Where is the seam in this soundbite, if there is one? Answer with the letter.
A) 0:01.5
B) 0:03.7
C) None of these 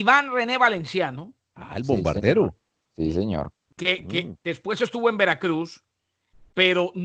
C